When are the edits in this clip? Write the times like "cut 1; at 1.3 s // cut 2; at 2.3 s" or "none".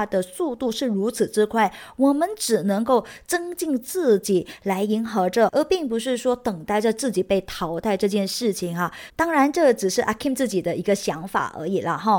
cut 1; at 5.5 s // cut 2; at 9.1 s